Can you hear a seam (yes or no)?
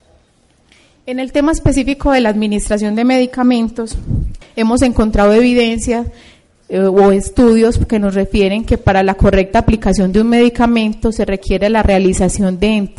yes